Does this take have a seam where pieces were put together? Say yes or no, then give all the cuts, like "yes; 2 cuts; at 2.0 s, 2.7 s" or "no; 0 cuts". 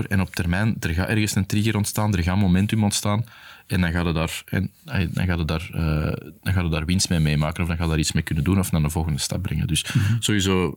no; 0 cuts